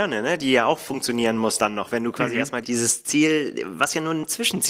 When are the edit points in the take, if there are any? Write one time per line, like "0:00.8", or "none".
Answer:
0:02.6